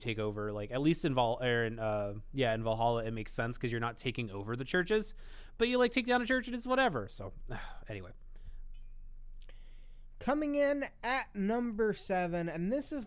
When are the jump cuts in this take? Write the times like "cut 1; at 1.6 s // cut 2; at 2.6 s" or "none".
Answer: none